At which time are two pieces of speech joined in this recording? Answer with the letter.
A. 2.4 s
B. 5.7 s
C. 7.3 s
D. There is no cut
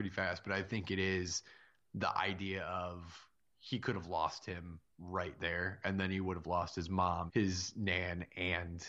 C